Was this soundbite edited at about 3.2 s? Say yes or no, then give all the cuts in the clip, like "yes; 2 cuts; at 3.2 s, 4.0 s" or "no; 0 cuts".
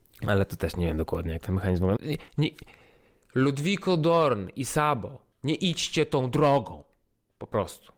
no; 2 cuts; at 2.0 s, 5.3 s